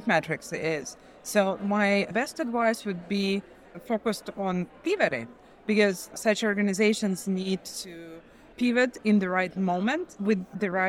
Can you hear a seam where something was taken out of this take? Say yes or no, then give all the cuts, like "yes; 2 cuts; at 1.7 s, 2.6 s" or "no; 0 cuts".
yes; 1 cut; at 6.1 s